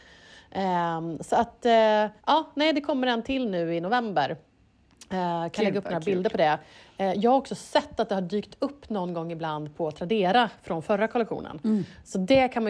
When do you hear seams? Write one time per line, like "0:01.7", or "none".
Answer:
0:02.2